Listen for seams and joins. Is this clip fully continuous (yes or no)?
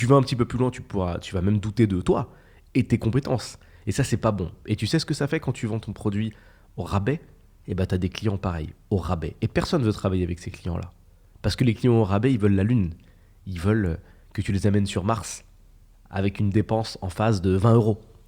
yes